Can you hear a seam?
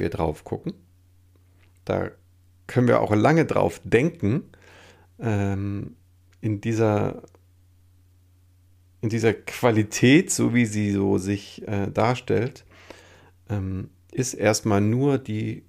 no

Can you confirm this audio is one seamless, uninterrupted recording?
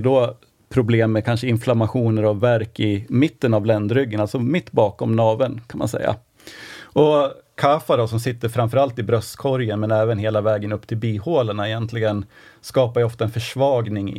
yes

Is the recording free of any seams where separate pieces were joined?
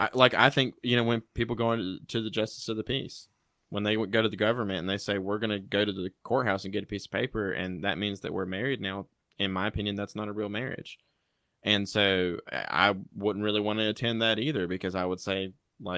no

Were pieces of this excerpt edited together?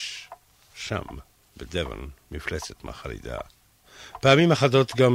no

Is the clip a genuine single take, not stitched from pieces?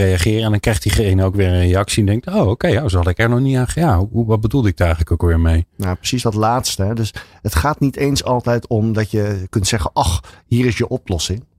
yes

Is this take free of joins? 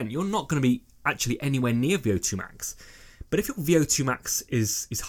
yes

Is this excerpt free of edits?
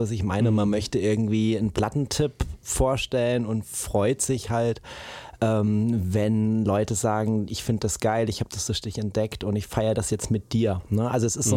yes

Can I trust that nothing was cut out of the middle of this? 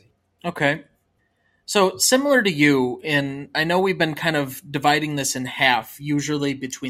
yes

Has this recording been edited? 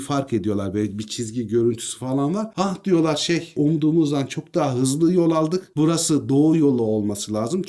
no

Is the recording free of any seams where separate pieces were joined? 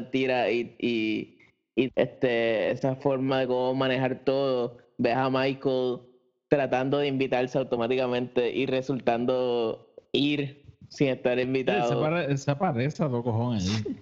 no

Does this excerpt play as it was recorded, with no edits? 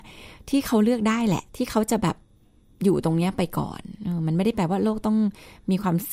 no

